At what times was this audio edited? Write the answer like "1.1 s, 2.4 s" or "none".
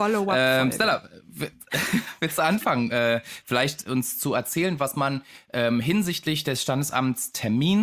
none